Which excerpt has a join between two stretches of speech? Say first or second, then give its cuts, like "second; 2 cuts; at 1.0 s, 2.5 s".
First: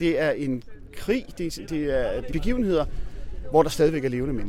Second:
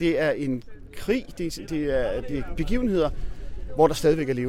first; 1 cut; at 2.3 s